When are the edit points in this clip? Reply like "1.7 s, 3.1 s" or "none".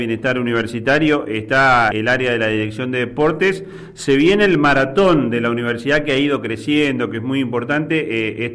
1.9 s